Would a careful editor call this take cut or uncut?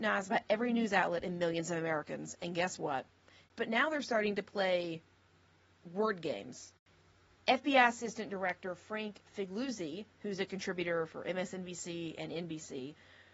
cut